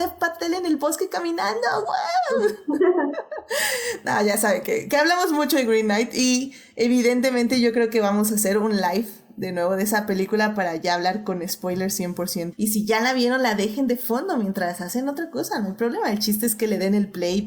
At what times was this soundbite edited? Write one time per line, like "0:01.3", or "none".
0:12.5

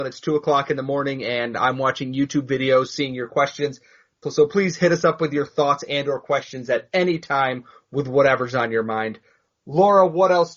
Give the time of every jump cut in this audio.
none

